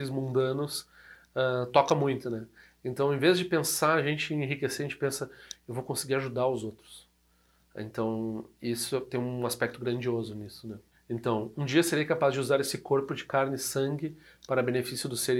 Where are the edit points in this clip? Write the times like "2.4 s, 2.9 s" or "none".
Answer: none